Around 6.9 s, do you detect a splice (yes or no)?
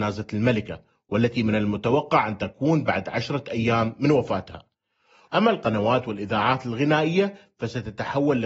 no